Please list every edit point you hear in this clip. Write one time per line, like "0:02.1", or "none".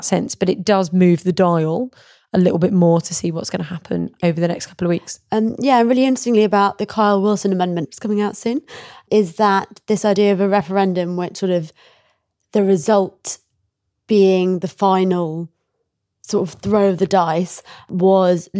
0:07.8